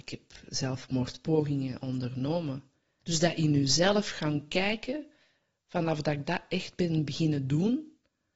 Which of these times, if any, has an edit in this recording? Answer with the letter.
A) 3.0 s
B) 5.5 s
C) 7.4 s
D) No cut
A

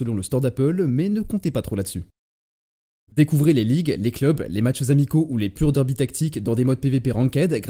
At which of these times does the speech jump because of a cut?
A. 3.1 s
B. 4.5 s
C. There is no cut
A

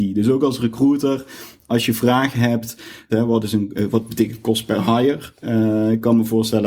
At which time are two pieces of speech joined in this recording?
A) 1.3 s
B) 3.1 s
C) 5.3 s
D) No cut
B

